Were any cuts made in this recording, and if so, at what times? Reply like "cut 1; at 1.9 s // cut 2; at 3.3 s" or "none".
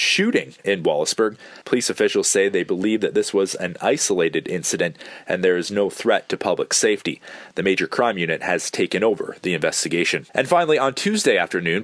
cut 1; at 1.6 s // cut 2; at 10.3 s